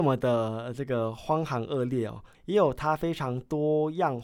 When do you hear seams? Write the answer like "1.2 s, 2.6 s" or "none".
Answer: 2.3 s